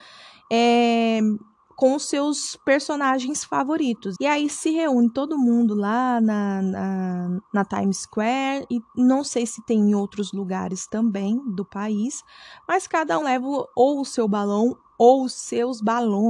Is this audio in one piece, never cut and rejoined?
no; 3 cuts; at 4.2 s, 7.5 s, 13.2 s

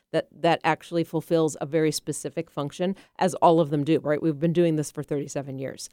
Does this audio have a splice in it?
no; 0 cuts

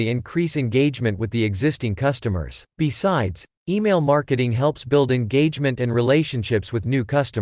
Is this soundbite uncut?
no; 1 cut; at 2.7 s

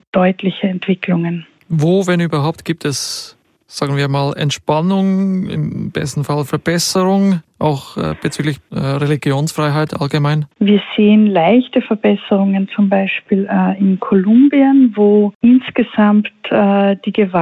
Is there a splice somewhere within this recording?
no; 0 cuts

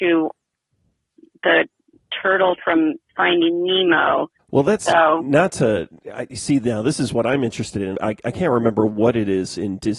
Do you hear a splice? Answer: yes; 2 cuts; at 4.4 s, 7.9 s

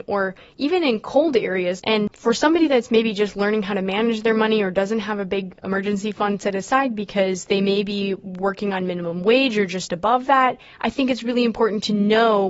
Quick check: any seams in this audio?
yes; 1 cut; at 1.8 s

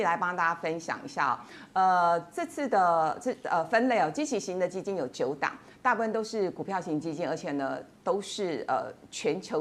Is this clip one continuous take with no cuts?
yes; 0 cuts

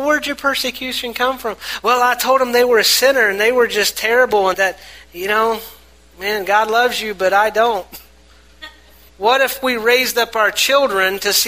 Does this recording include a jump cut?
yes; 2 cuts; at 4.5 s, 9.1 s

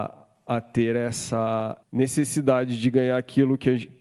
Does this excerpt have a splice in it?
yes; 1 cut; at 1.8 s

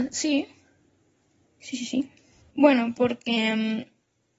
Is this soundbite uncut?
no; 1 cut; at 2.4 s

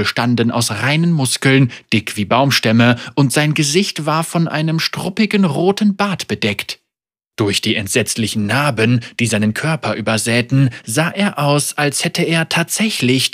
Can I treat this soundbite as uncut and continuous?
yes; 0 cuts

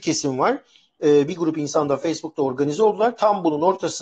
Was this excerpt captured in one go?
no; 1 cut; at 1.3 s

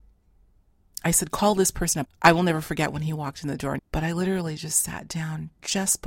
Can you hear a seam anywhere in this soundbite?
yes; 2 cuts; at 2.0 s, 3.8 s

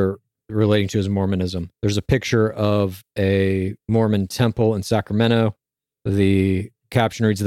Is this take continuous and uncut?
no; 1 cut; at 1.7 s

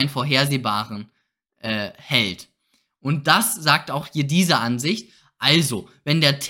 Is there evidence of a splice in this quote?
no; 0 cuts

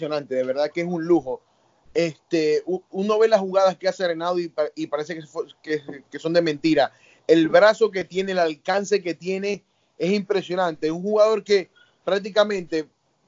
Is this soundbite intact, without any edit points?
yes; 0 cuts

